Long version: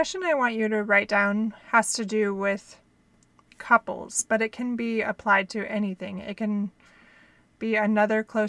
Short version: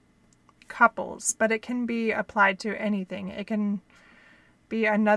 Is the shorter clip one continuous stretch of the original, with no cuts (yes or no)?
yes